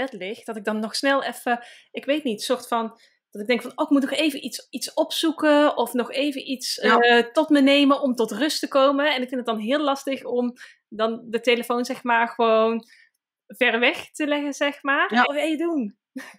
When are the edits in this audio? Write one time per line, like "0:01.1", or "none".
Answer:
0:15.3

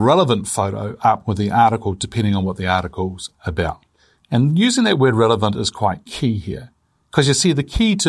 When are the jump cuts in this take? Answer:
none

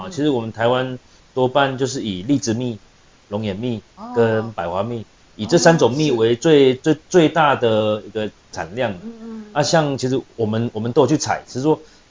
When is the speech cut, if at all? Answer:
0:08.5
0:10.4

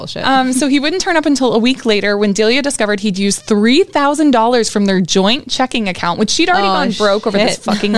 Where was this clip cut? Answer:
none

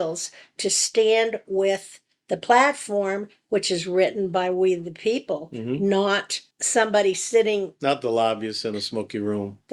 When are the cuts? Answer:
0:06.5

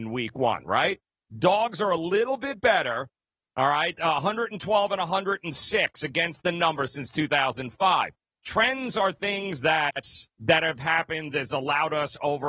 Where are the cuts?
0:08.3
0:10.3

